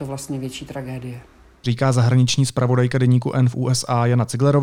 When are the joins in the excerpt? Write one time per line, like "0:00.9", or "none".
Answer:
none